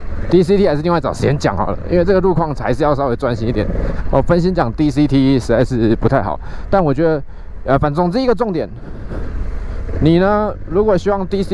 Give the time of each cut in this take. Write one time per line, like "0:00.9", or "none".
none